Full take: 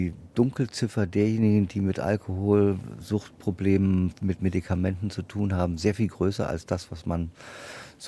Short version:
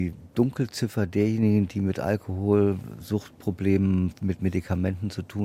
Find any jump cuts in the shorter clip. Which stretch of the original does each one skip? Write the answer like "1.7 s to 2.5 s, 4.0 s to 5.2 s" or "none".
none